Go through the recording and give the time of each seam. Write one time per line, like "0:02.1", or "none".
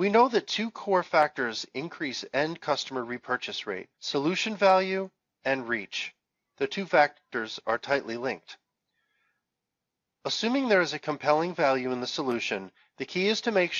0:03.9